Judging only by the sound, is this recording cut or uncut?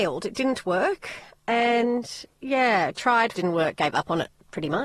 cut